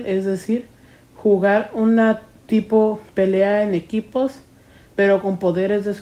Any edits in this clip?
no; 0 cuts

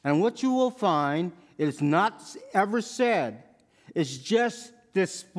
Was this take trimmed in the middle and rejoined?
no; 0 cuts

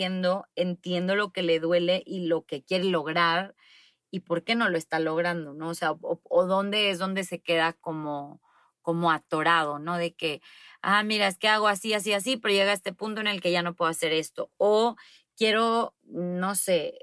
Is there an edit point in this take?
no; 0 cuts

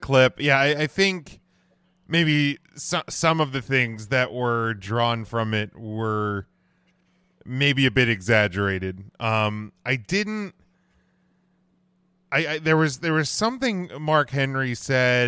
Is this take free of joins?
yes; 0 cuts

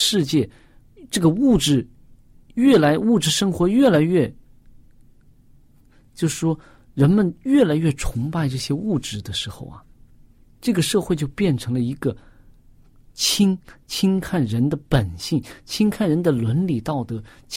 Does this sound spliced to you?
no; 0 cuts

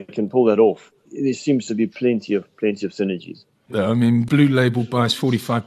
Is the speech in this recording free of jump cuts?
no; 1 cut; at 3.7 s

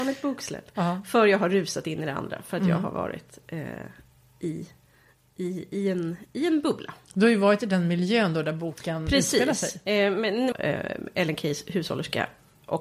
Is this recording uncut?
no; 1 cut; at 10.5 s

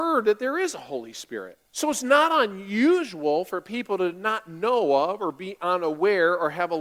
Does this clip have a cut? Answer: yes; 1 cut; at 1.7 s

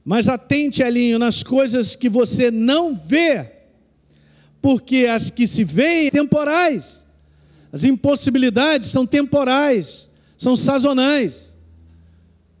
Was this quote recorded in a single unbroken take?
no; 1 cut; at 6.1 s

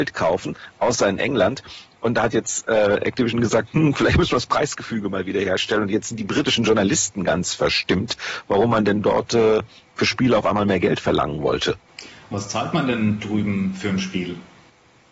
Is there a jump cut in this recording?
no; 0 cuts

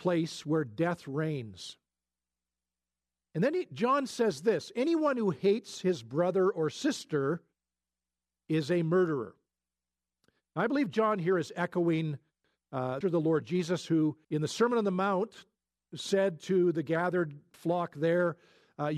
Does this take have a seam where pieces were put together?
yes; 3 cuts; at 13.0 s, 14.2 s, 17.5 s

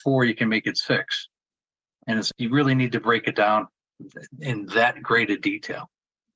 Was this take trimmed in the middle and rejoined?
yes; 1 cut; at 2.3 s

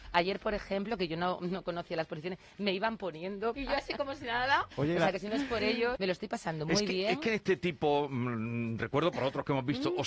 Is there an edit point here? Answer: yes; 2 cuts; at 3.5 s, 5.9 s

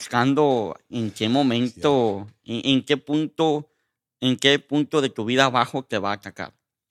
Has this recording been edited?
no; 0 cuts

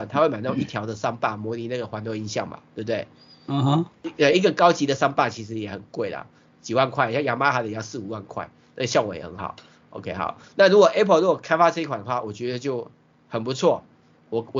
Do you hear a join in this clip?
no; 0 cuts

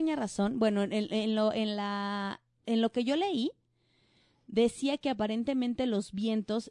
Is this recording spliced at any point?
yes; 1 cut; at 2.6 s

